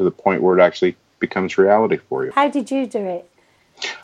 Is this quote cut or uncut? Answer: cut